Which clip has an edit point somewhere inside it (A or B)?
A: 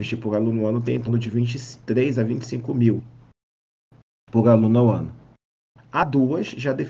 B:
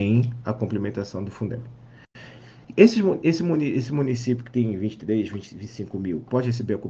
A